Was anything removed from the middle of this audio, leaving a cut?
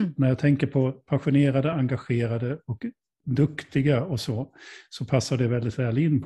no; 0 cuts

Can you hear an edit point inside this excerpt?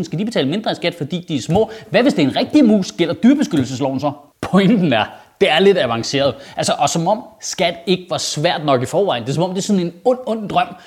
no; 0 cuts

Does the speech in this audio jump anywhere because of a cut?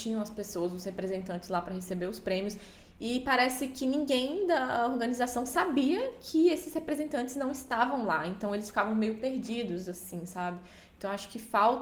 no; 0 cuts

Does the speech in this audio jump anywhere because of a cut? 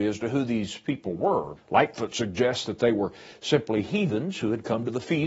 yes; 1 cut; at 1.6 s

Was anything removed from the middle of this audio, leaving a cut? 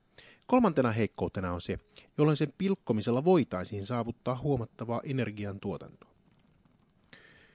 yes; 1 cut; at 2.1 s

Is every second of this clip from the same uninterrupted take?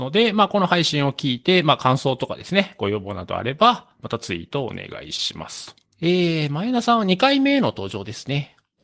no; 1 cut; at 5.9 s

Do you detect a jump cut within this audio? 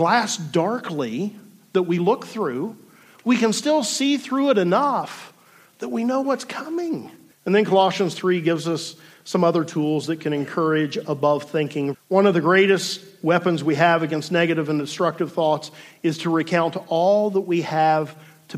yes; 2 cuts; at 7.3 s, 11.9 s

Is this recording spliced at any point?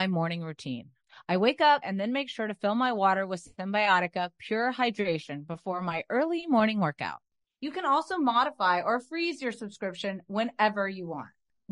yes; 2 cuts; at 1.8 s, 7.4 s

